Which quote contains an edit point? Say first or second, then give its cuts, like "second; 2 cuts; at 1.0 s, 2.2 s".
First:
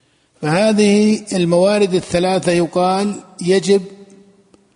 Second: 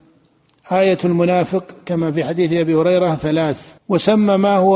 second; 1 cut; at 3.8 s